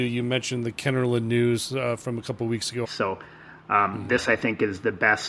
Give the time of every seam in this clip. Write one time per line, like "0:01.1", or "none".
0:02.8